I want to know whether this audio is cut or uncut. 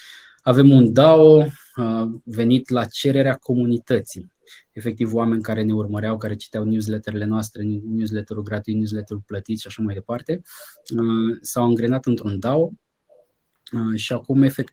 uncut